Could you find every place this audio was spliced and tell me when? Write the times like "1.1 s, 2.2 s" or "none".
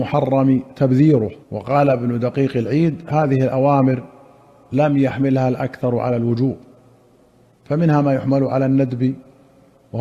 1.4 s